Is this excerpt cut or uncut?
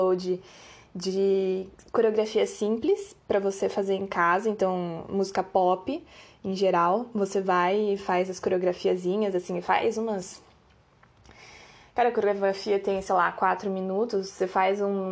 uncut